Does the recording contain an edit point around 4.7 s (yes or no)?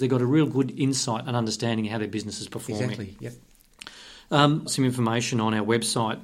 yes